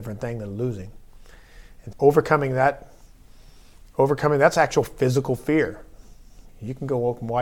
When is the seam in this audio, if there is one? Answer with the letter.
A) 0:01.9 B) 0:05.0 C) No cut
A